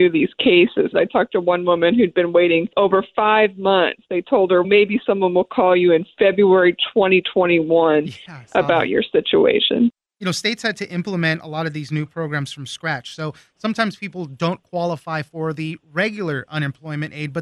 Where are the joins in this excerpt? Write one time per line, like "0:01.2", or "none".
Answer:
0:00.9
0:04.6